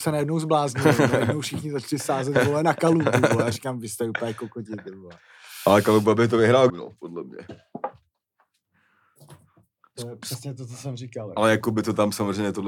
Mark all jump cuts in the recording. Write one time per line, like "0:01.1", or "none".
0:06.7